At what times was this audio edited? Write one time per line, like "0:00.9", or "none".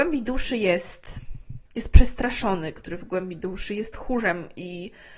0:01.7

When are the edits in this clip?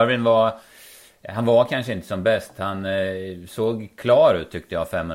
none

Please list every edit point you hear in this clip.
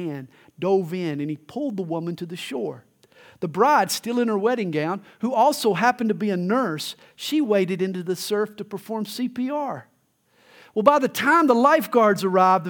none

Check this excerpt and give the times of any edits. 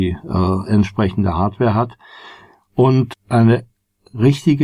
0:03.1

